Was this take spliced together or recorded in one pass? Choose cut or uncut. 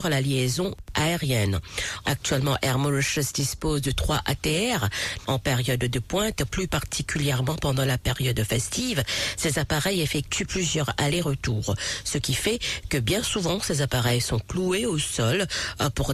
cut